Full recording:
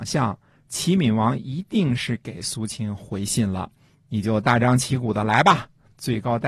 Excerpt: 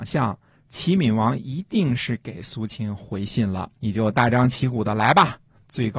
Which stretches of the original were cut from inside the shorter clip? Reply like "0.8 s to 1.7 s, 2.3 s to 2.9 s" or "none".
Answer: 3.8 s to 4.0 s

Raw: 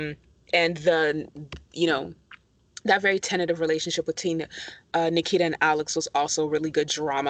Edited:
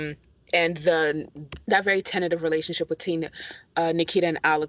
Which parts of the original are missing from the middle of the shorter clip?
1.6 s to 2.8 s

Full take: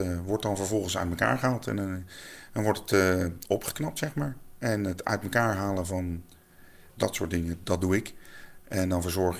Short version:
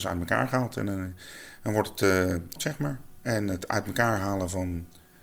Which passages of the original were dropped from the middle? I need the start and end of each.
3.5 s to 3.9 s

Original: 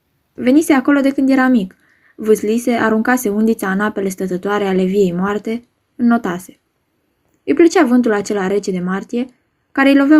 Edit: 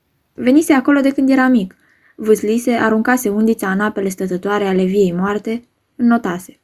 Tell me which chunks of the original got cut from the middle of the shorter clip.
none

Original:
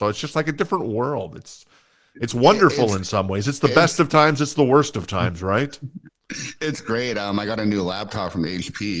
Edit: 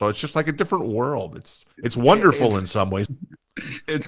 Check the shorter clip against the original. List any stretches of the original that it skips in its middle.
1.7 s to 2.1 s, 3.4 s to 5.8 s

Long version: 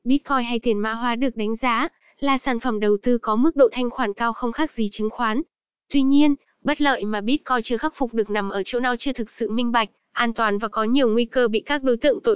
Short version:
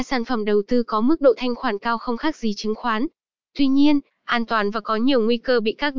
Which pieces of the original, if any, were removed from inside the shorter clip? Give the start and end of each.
6.5 s to 10.0 s

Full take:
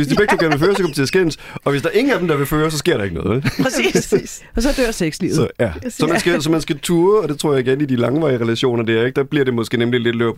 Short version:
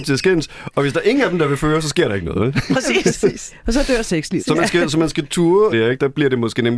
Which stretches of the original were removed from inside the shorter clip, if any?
5.3 s to 5.9 s, 7.2 s to 8.9 s

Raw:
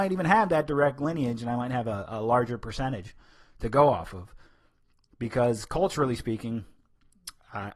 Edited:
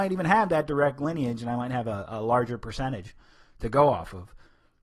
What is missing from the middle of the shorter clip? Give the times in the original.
none

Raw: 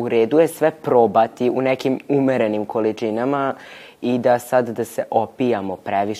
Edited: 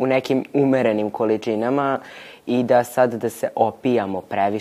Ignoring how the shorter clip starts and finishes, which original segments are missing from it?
none

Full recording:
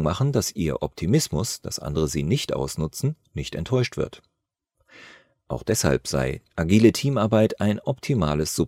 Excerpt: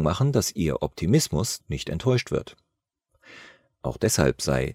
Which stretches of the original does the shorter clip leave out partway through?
1.6 s to 3.3 s

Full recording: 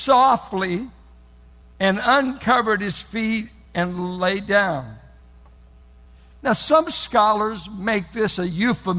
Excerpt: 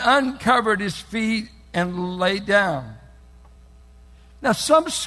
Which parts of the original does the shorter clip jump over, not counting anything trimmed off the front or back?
none

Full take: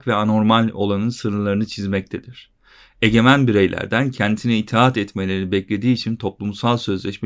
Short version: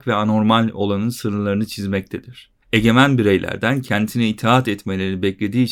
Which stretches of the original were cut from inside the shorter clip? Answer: 2.6 s to 2.9 s

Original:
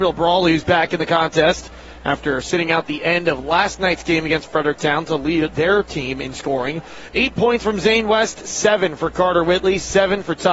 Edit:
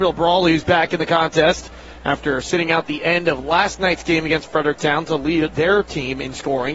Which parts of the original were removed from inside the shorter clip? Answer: none

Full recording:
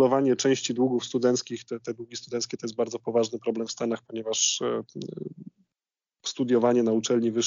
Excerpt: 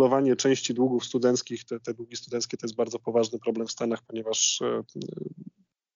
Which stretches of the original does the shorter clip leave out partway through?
none

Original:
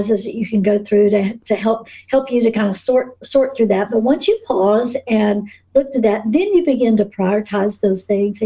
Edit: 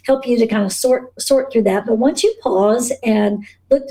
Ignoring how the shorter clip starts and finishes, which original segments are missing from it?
none

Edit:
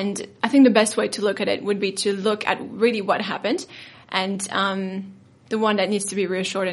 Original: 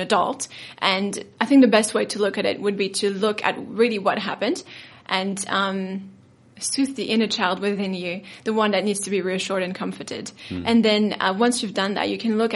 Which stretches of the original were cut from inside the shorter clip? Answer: 6.4 s to 8.4 s

